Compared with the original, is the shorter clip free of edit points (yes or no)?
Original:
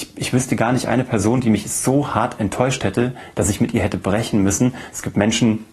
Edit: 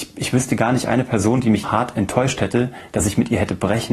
no